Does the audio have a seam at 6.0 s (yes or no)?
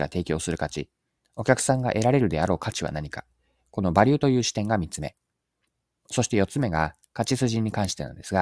no